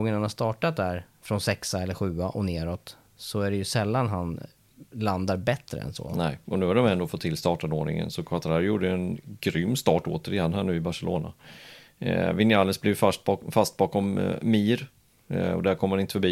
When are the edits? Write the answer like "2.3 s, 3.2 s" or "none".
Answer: none